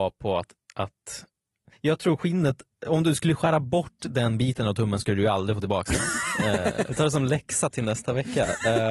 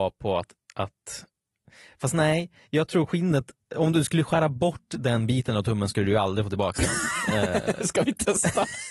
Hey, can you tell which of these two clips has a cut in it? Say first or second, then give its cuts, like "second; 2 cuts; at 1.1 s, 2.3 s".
first; 2 cuts; at 1.7 s, 6.9 s